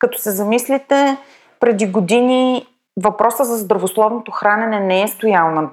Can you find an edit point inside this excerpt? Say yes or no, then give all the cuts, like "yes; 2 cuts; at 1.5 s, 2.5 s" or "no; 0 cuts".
no; 0 cuts